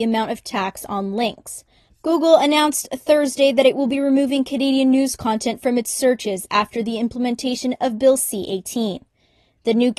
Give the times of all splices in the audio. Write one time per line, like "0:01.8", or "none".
0:01.9